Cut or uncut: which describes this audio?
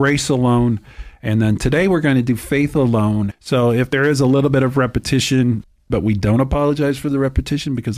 cut